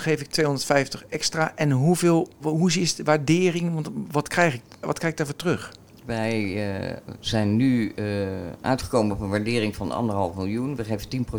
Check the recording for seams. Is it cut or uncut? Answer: cut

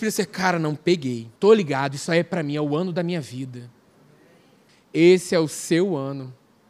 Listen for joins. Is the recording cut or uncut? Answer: cut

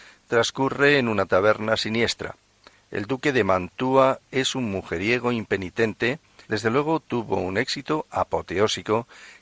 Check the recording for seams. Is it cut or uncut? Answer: cut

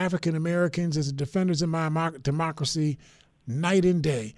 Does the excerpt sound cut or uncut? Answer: uncut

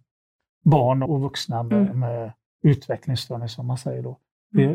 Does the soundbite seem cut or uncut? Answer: cut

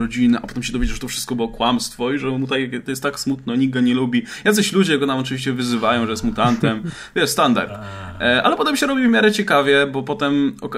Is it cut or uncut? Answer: uncut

